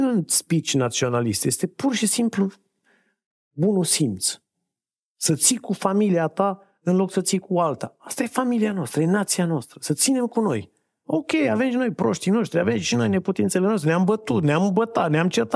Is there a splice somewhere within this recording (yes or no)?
no